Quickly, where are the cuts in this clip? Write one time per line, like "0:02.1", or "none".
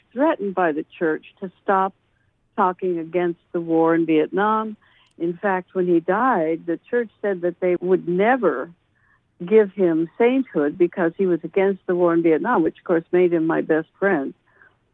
0:07.8